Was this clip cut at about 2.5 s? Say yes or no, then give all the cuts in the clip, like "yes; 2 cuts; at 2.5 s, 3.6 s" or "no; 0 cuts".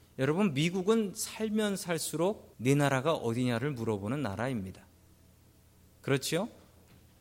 yes; 1 cut; at 2.5 s